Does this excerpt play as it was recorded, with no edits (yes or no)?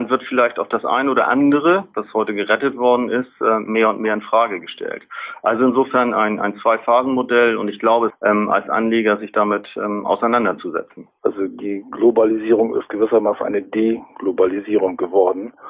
no